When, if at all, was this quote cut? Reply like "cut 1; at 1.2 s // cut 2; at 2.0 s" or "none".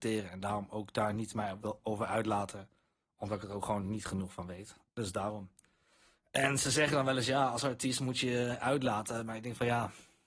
cut 1; at 4.9 s